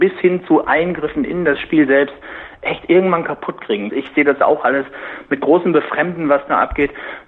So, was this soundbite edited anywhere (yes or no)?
yes